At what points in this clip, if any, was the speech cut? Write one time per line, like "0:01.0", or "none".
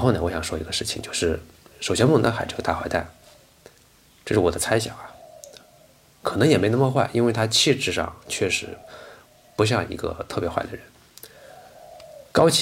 none